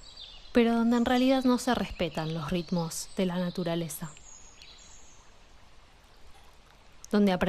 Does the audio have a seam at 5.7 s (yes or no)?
no